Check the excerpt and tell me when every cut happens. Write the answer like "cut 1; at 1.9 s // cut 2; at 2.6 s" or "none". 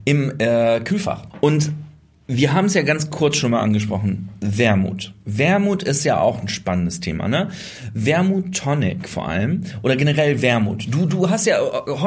cut 1; at 1.3 s

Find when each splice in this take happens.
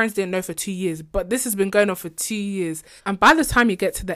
cut 1; at 3.0 s

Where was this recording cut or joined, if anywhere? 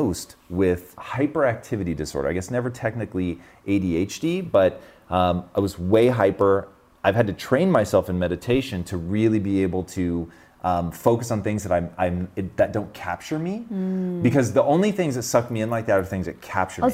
cut 1; at 1.0 s

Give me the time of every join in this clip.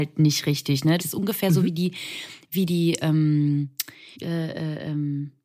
cut 1; at 1.0 s // cut 2; at 4.1 s

